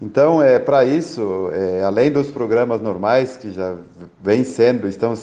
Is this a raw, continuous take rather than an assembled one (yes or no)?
yes